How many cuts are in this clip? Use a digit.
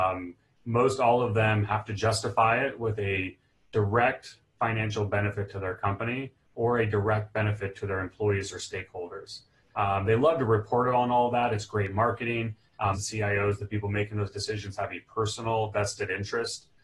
1